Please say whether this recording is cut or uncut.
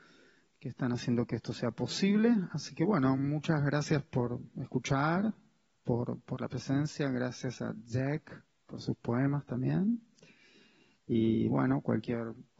uncut